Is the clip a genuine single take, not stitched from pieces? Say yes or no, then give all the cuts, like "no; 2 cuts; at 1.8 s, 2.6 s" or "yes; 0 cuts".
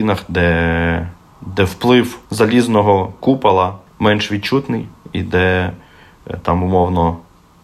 no; 2 cuts; at 2.3 s, 3.9 s